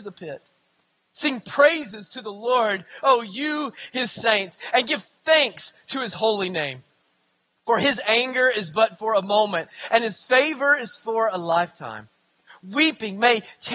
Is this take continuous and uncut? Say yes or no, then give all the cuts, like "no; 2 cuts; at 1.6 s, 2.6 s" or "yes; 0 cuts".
yes; 0 cuts